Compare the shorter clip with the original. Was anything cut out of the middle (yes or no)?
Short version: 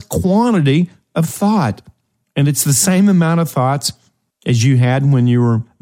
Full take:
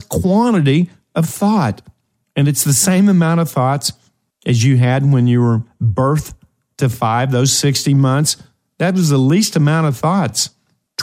no